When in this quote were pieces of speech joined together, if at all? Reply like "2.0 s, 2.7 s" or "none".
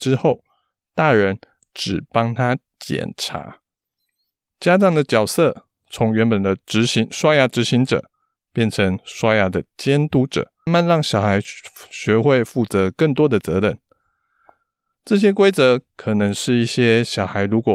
10.7 s